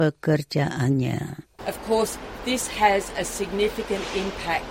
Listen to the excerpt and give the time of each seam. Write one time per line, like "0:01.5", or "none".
0:01.6